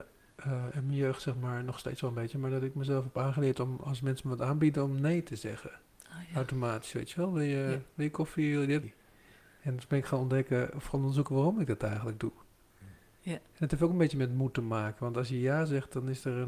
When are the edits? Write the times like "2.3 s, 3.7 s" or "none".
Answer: 8.8 s